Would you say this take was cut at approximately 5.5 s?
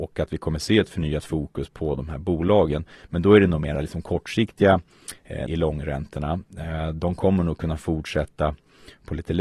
yes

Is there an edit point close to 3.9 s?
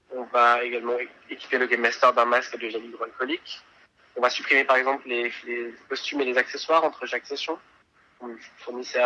no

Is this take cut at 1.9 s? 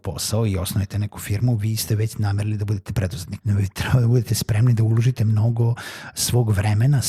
no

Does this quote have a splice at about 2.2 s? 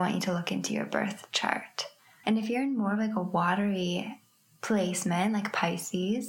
yes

